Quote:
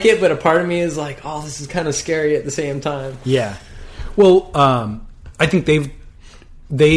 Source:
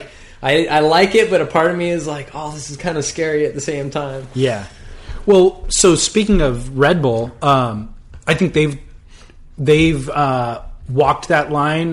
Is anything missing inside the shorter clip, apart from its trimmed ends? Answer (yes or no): yes